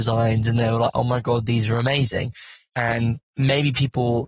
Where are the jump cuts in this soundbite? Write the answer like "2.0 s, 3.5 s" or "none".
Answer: 2.7 s